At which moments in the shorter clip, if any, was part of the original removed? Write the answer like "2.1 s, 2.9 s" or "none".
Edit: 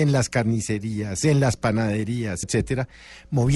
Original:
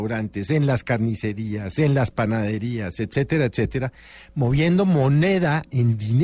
2.4 s